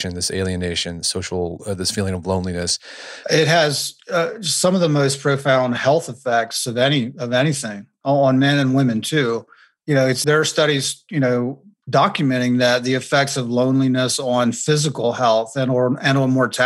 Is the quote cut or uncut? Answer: cut